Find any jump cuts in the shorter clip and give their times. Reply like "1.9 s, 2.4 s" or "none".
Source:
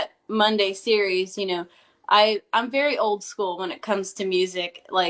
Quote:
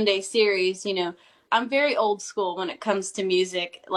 1.5 s